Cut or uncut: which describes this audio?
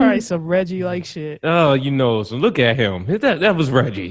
uncut